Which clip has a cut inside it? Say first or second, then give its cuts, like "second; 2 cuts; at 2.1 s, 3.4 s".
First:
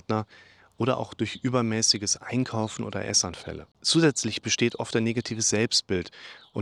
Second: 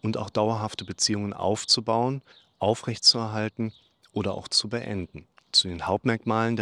second; 1 cut; at 5.4 s